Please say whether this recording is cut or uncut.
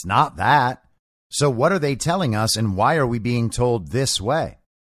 cut